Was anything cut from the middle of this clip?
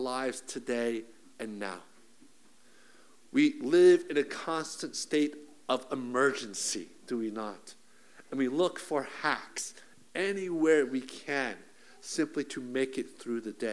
no; 0 cuts

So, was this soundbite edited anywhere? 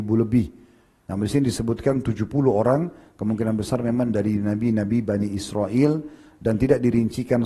yes; 1 cut; at 1.0 s

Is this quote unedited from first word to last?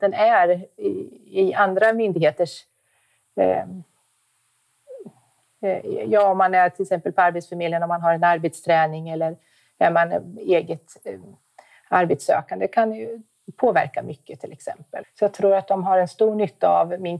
no; 1 cut; at 15.0 s

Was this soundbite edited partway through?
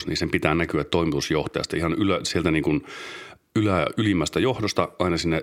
no; 0 cuts

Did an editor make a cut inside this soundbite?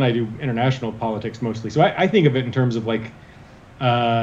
no; 0 cuts

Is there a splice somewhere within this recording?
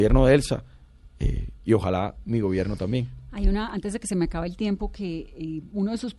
no; 0 cuts

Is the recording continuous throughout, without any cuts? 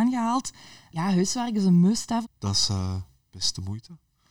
no; 1 cut; at 2.2 s

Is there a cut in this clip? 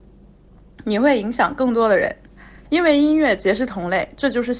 yes; 1 cut; at 2.6 s

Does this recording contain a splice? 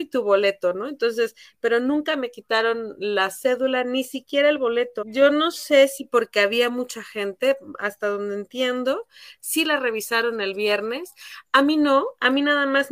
yes; 1 cut; at 5.0 s

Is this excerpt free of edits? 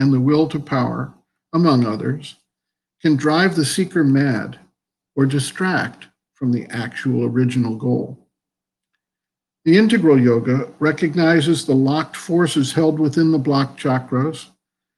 yes; 0 cuts

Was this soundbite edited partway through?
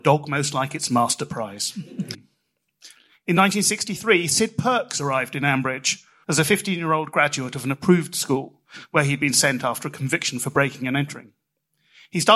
yes; 2 cuts; at 2.1 s, 6.2 s

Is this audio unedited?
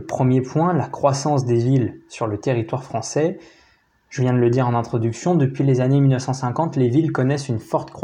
yes; 0 cuts

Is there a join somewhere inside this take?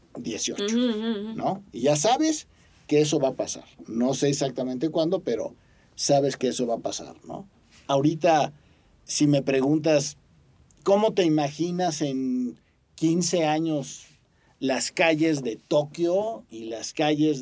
no; 0 cuts

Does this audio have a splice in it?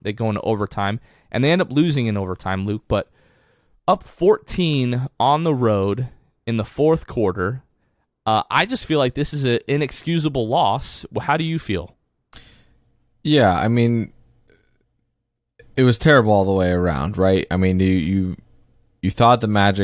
no; 0 cuts

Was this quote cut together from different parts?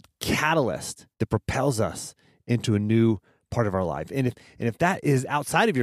yes; 1 cut; at 1.1 s

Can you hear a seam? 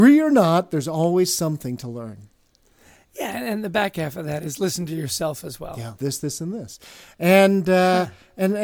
yes; 1 cut; at 6.0 s

